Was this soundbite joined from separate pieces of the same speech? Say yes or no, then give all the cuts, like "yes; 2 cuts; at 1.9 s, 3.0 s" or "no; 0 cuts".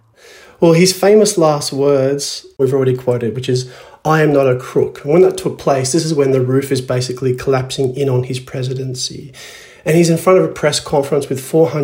no; 0 cuts